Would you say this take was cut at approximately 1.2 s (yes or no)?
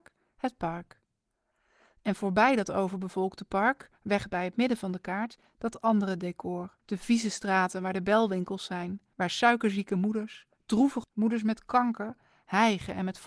no